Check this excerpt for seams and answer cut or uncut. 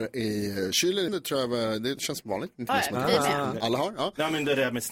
cut